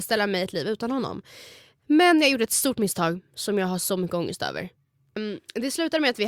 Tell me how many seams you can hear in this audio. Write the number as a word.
one